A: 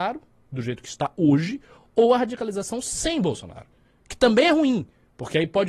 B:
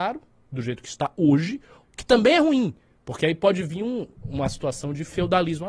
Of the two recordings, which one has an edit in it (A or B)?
B